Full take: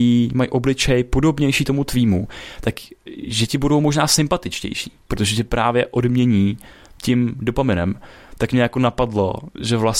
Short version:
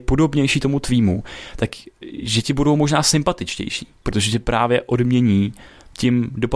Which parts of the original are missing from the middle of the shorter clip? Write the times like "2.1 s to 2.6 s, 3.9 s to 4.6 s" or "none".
none